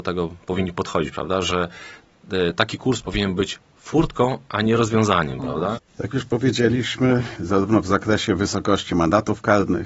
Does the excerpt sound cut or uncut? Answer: cut